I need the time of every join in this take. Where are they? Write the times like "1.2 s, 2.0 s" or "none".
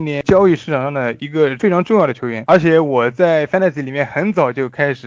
none

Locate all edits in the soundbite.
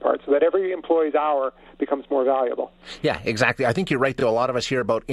none

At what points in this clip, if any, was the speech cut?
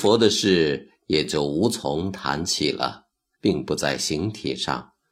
3.4 s

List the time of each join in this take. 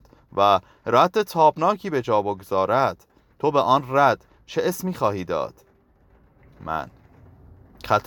none

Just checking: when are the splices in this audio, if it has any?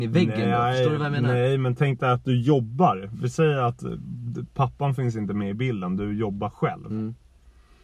none

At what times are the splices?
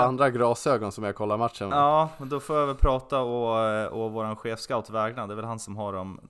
none

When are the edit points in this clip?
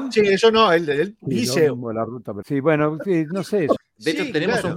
2.4 s, 3.8 s

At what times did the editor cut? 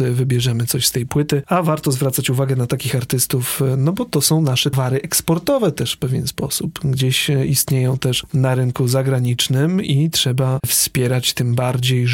4.7 s

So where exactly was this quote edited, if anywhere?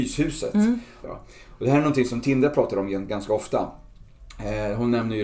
1.0 s

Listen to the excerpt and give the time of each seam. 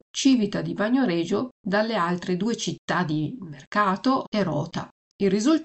4.2 s

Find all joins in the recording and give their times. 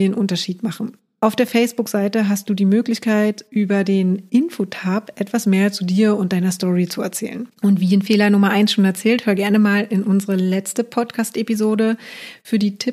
7.6 s

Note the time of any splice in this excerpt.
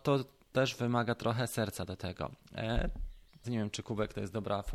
3.4 s

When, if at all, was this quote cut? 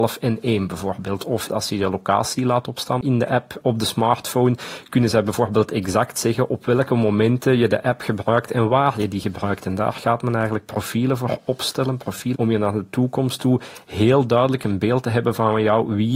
12.3 s

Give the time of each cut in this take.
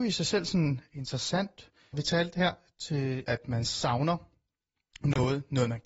1.9 s, 3.3 s

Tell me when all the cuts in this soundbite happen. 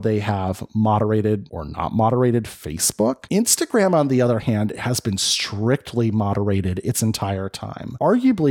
none

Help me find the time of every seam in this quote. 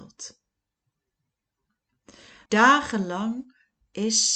2.5 s

